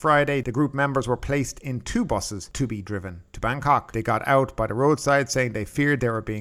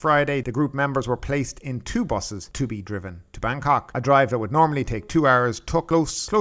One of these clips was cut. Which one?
first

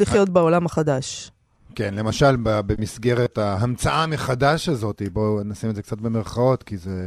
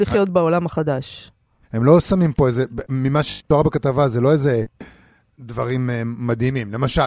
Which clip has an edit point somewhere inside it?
second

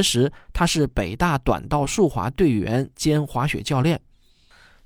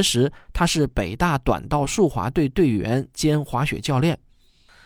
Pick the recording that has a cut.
first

